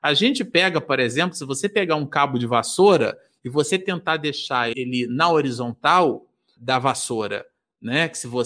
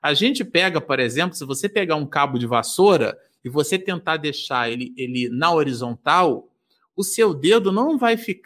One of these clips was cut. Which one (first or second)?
first